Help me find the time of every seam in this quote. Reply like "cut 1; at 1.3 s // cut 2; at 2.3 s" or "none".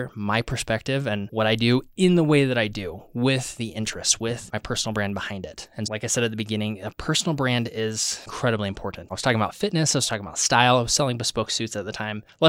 cut 1; at 5.8 s // cut 2; at 9.1 s

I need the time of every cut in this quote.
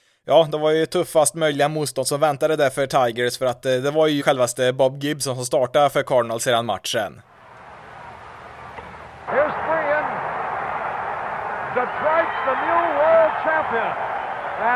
cut 1; at 4.2 s // cut 2; at 9.3 s

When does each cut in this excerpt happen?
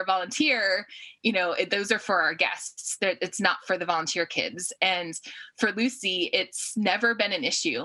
none

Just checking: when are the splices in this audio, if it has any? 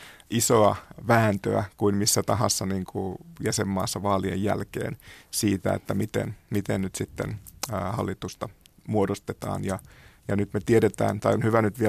none

